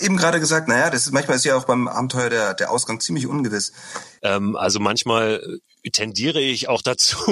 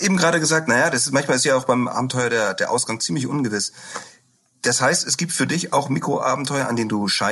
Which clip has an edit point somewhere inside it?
first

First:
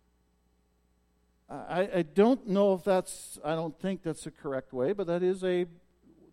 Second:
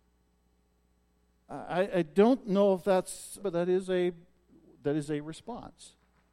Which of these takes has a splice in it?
second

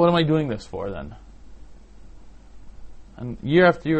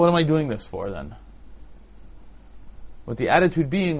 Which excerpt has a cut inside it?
first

